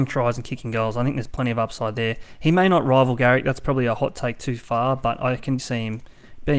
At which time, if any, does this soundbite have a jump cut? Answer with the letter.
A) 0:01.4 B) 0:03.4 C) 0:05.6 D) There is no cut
C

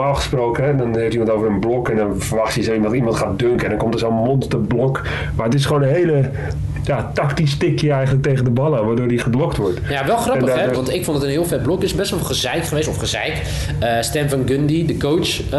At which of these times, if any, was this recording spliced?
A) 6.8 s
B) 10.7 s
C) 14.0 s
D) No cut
B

